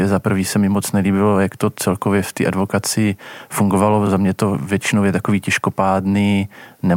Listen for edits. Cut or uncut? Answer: uncut